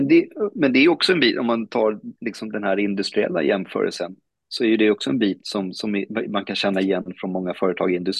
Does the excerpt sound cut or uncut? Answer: uncut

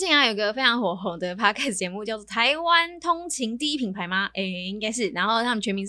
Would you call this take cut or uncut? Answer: uncut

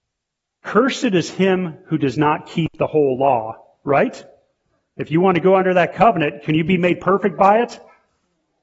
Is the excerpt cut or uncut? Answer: uncut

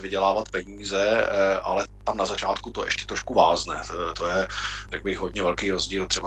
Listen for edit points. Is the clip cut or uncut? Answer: uncut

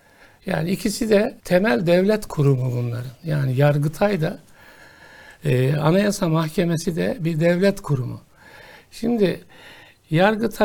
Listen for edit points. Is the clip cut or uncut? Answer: cut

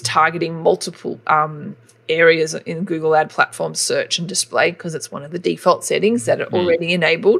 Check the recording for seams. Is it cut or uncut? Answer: uncut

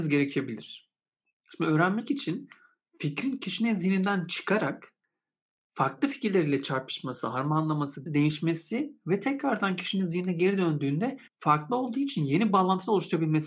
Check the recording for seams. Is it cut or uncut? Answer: cut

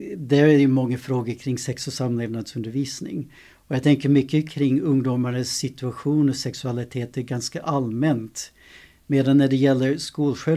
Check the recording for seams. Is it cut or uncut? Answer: uncut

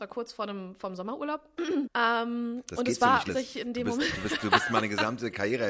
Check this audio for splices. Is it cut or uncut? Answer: cut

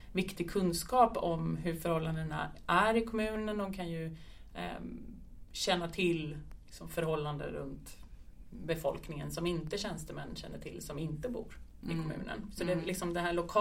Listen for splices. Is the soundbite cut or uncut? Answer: uncut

